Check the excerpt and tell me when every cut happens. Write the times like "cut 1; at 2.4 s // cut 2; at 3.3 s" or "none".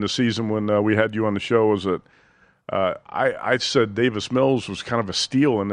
none